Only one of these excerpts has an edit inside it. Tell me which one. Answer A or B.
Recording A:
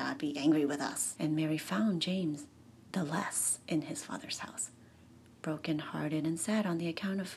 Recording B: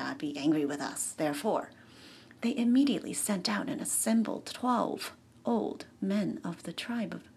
A